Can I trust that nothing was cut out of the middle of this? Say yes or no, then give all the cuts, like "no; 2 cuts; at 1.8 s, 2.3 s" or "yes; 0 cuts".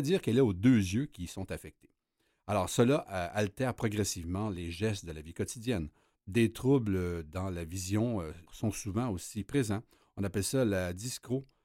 no; 2 cuts; at 6.2 s, 8.5 s